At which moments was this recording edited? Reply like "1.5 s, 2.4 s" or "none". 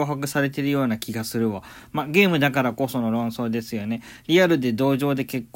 none